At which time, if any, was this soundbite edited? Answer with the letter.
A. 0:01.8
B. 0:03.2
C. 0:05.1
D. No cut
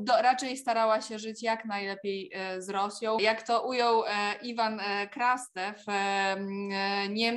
B